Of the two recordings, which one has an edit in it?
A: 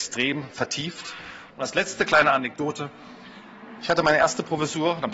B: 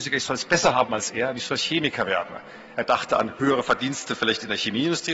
A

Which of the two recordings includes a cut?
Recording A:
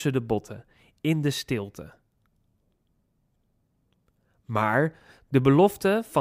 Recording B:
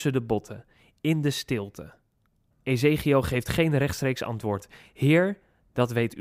B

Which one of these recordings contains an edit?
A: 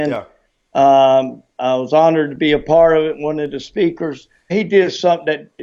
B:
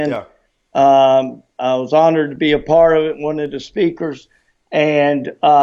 A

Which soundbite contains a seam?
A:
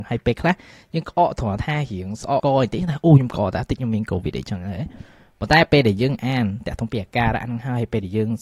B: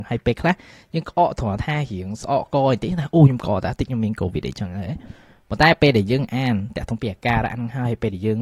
A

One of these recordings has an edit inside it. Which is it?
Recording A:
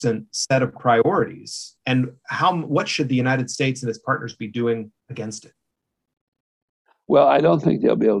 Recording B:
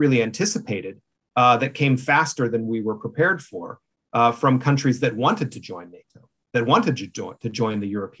A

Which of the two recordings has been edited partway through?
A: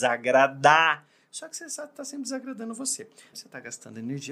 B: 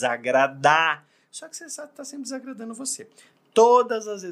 A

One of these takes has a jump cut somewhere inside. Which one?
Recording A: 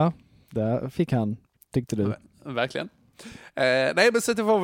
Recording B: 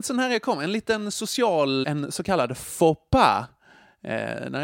B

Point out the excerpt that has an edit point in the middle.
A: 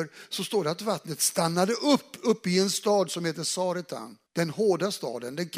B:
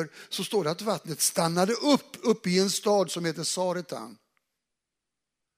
A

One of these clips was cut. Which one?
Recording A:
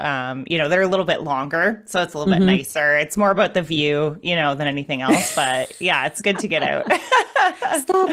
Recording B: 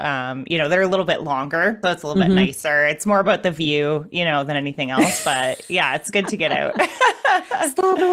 B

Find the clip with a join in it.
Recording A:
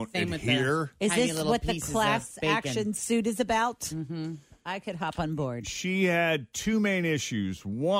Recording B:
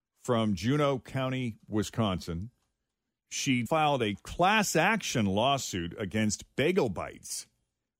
B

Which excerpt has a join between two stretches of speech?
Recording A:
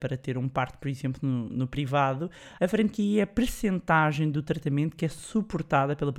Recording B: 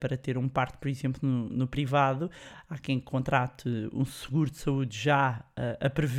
A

